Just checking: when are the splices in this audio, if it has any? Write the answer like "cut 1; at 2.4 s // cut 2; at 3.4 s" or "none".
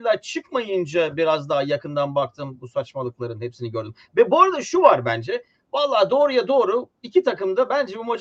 none